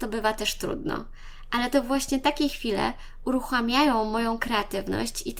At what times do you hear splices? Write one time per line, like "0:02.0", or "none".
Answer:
none